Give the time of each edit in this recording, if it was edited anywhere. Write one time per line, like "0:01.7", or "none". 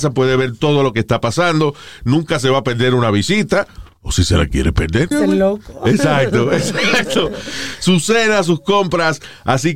0:05.1